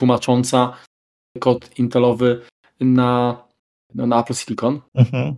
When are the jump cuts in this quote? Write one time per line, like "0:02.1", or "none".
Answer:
none